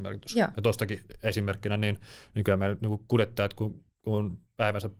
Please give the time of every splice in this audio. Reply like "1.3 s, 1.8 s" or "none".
none